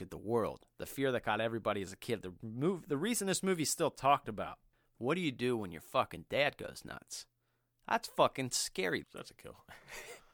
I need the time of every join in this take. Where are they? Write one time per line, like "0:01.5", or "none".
0:09.0